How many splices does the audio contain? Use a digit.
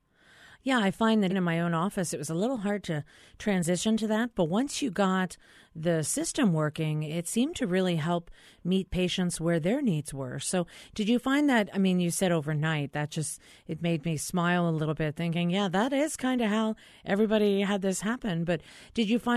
1